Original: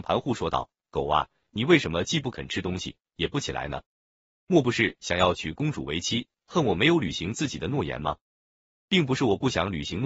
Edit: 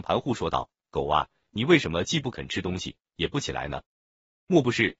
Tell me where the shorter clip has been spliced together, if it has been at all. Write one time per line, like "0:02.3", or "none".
none